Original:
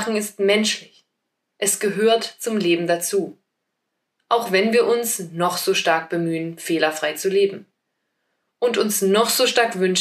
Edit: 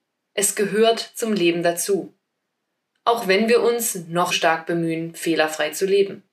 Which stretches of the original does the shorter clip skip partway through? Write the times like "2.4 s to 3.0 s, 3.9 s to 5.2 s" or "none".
5.5 s to 5.7 s